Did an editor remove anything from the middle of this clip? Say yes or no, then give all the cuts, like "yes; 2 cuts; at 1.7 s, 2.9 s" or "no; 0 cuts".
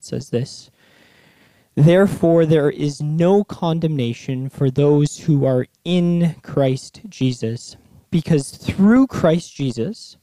no; 0 cuts